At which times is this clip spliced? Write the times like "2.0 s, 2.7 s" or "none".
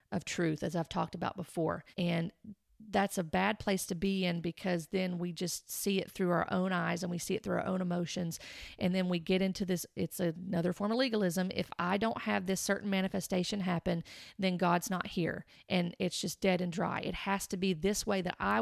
1.9 s